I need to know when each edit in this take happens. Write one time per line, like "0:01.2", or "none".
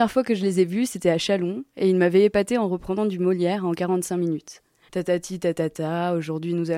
0:04.9